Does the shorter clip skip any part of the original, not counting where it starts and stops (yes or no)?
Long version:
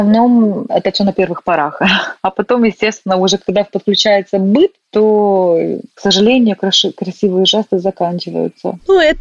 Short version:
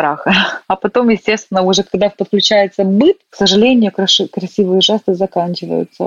yes